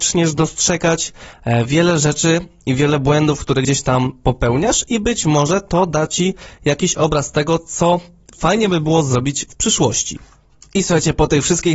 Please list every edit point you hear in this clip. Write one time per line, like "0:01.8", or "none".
0:10.7